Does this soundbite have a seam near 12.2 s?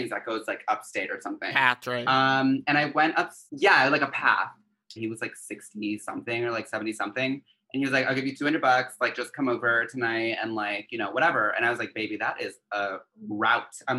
no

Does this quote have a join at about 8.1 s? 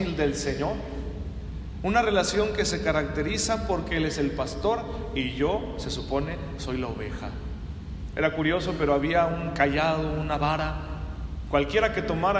yes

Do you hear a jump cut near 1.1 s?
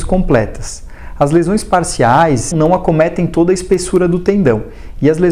no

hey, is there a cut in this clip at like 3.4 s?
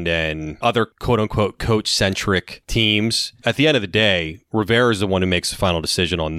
no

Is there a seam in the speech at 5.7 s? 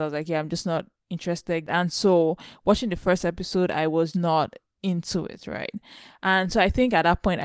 no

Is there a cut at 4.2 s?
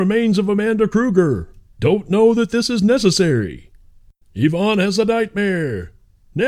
yes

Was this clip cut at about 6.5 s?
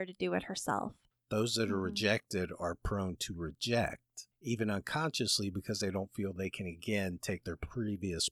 no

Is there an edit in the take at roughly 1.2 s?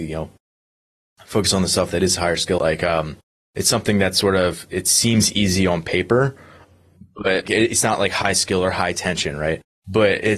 no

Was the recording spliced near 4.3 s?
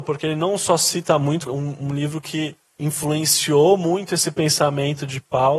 no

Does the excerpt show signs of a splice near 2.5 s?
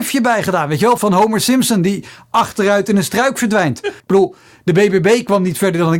no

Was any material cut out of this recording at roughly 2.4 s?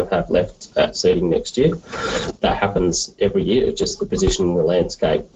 yes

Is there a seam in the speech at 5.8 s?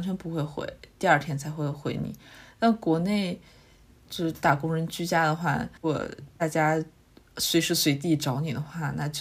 yes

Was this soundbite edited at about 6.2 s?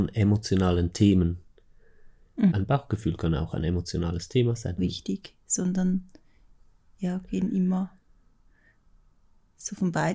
no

